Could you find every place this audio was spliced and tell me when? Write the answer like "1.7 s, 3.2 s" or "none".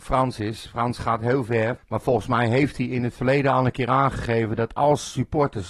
1.8 s